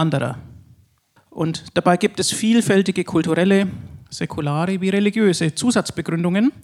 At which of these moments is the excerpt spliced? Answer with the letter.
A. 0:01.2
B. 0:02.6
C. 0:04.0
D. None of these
A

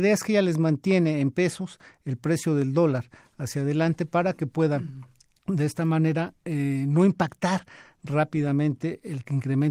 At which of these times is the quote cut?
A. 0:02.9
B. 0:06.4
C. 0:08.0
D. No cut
D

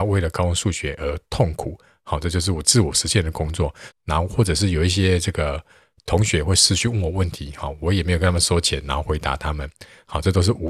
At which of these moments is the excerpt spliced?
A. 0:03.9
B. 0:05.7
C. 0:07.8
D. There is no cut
A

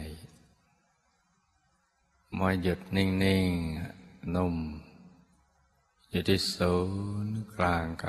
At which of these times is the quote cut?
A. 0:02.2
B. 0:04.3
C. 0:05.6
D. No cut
B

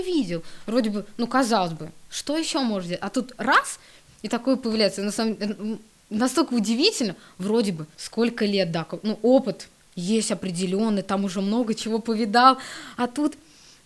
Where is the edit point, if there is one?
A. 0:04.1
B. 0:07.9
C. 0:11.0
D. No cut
B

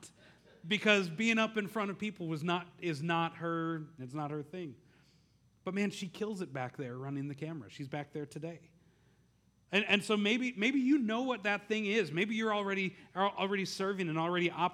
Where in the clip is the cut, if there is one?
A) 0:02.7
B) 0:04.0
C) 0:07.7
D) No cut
B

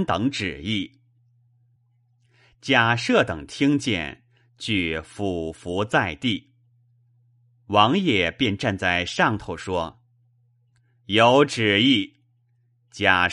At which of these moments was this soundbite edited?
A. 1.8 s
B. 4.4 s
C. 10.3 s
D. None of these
A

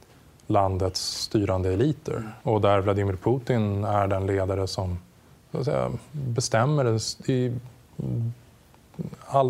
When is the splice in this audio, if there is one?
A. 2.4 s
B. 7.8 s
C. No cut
A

